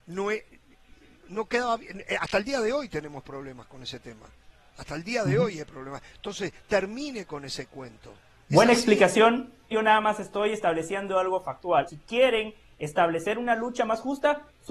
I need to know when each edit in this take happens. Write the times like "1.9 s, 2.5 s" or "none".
9.7 s, 11.9 s